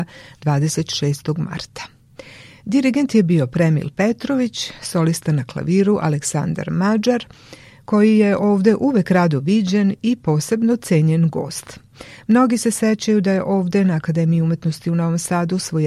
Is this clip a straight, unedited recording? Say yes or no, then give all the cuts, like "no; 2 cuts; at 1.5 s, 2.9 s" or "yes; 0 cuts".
yes; 0 cuts